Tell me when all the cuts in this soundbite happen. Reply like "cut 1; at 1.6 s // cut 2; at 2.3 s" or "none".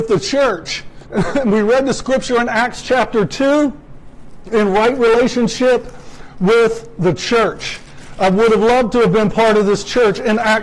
cut 1; at 1.0 s